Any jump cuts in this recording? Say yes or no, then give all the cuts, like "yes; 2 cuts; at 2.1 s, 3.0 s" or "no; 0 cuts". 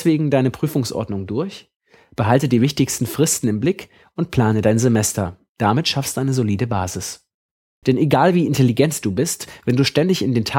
yes; 1 cut; at 7.8 s